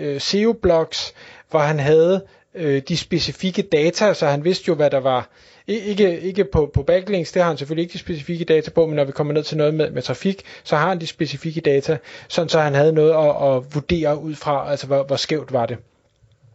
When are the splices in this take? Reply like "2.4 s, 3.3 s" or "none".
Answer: none

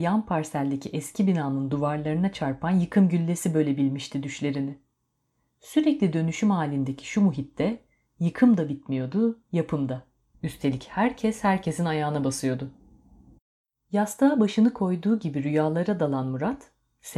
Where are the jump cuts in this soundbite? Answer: 10.3 s

